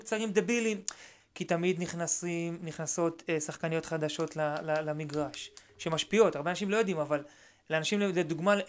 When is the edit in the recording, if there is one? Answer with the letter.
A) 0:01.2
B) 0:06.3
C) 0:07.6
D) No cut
A